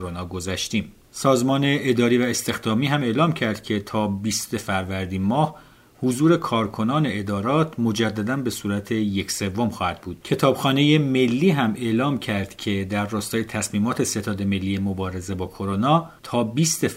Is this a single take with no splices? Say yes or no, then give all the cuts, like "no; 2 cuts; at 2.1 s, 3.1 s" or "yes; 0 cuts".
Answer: no; 1 cut; at 10.2 s